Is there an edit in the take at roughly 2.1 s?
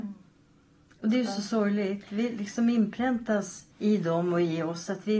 no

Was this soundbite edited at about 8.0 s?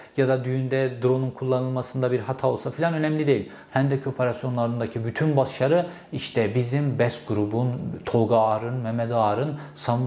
no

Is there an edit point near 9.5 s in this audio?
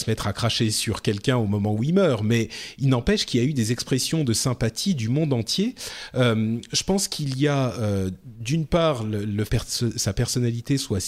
yes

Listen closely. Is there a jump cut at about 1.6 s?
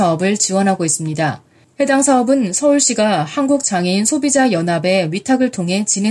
yes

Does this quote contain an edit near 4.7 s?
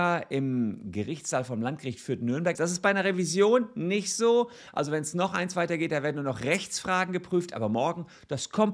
no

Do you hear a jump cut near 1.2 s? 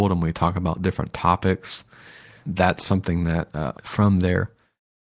no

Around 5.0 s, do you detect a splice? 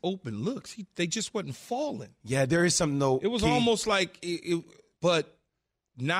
yes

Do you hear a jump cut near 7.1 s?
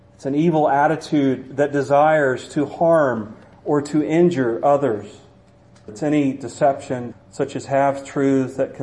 yes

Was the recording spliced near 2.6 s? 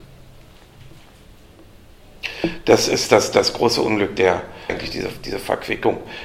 no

